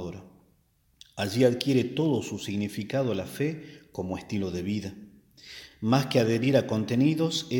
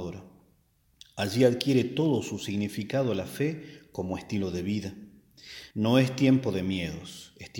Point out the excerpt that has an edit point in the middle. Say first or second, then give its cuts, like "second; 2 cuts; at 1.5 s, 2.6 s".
second; 1 cut; at 5.7 s